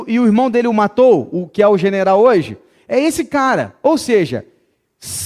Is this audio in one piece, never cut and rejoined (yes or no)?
yes